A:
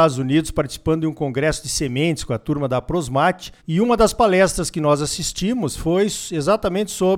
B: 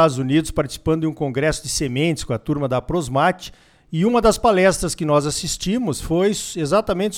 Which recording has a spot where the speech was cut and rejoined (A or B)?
A